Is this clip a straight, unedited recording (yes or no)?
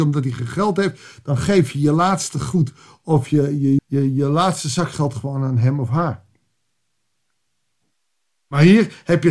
no